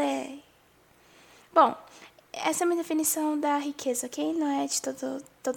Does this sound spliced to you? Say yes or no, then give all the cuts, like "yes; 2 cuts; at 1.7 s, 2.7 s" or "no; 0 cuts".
no; 0 cuts